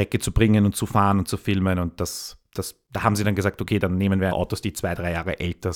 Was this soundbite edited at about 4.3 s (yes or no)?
yes